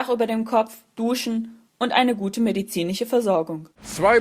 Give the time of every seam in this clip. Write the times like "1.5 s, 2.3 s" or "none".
0.9 s

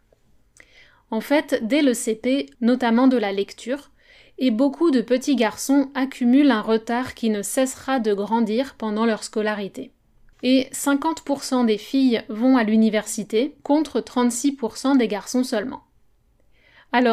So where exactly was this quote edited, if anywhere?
2.5 s, 10.3 s, 13.6 s

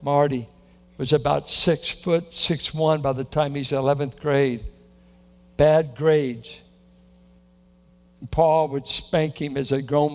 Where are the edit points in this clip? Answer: none

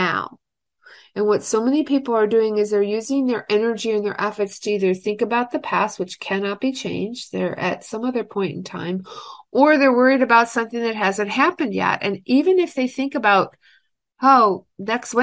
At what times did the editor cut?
none

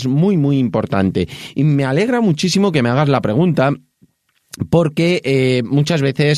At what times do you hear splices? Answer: none

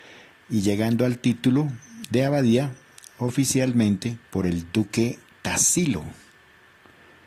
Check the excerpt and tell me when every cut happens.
4.3 s

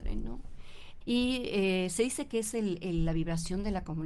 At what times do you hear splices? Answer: 1.0 s

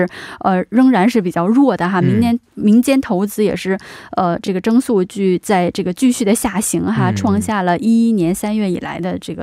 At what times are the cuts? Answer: none

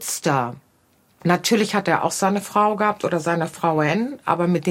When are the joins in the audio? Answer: none

